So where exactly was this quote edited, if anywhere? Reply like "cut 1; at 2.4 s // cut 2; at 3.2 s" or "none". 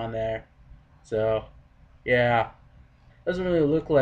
cut 1; at 3.1 s